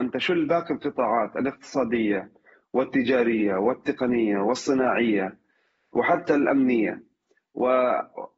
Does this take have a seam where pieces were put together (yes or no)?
no